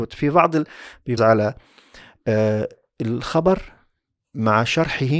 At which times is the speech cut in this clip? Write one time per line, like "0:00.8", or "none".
0:01.2